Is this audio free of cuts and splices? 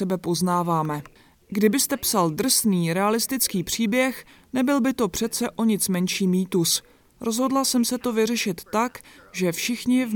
yes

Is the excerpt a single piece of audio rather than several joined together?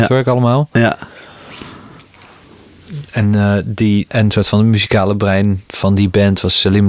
no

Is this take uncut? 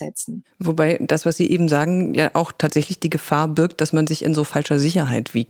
yes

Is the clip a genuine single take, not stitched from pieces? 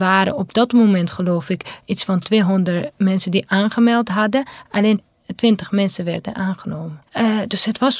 no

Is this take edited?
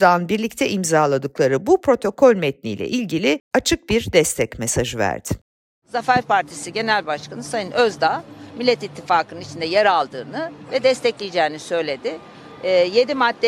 no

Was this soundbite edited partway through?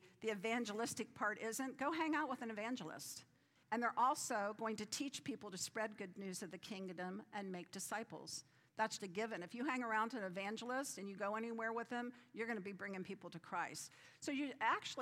yes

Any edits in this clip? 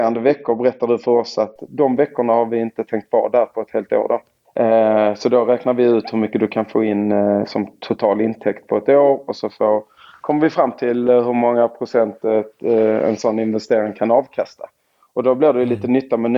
no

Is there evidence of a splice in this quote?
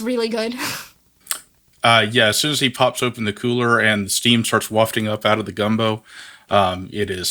no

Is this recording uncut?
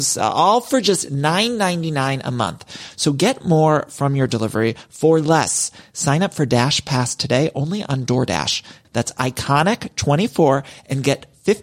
no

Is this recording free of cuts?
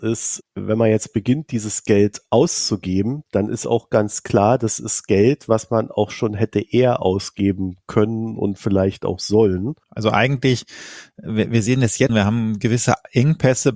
no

